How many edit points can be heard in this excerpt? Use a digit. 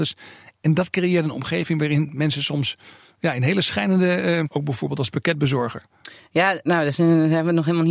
2